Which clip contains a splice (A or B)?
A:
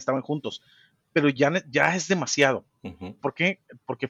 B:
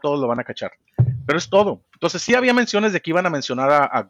A